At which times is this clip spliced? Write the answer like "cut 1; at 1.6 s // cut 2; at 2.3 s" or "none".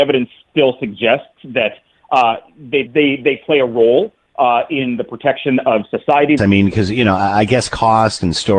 cut 1; at 2.9 s // cut 2; at 6.4 s

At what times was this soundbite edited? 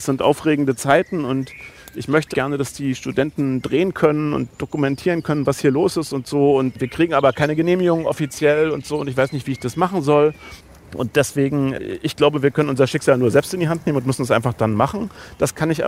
cut 1; at 2.3 s

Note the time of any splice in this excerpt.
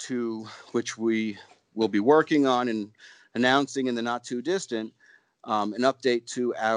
none

